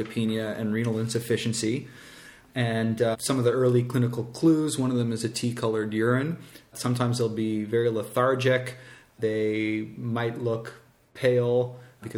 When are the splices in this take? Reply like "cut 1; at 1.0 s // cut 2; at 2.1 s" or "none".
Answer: none